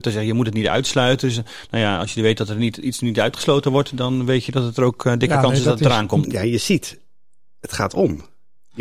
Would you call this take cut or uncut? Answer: cut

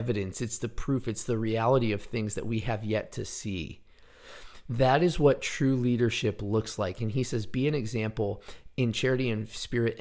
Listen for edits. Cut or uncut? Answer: uncut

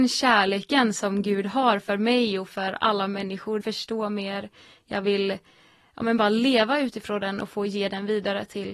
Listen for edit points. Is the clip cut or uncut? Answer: cut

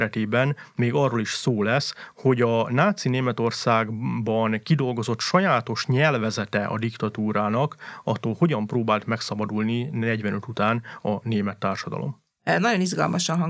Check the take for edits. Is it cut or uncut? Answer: uncut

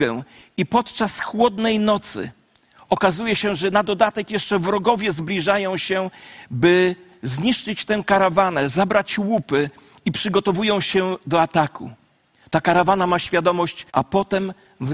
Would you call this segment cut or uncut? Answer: cut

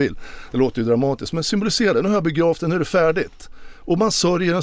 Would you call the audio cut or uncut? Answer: uncut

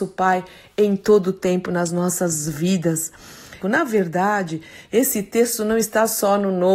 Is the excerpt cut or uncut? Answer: cut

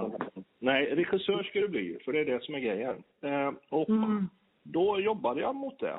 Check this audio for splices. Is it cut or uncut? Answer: uncut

